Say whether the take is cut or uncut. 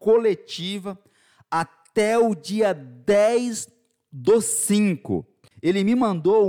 cut